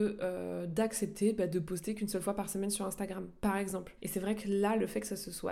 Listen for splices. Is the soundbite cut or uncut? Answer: cut